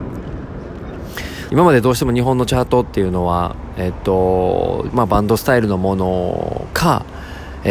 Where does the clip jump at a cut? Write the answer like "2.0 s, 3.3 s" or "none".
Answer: 1.5 s, 4.9 s